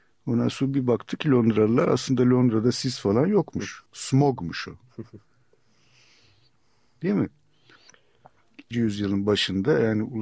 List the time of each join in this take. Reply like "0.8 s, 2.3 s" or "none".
3.9 s, 8.7 s